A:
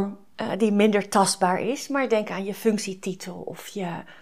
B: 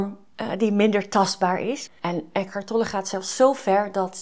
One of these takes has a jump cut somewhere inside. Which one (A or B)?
B